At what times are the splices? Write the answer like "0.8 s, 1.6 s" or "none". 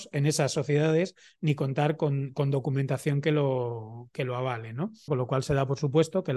5.1 s